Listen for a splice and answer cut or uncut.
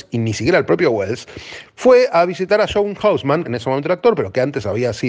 cut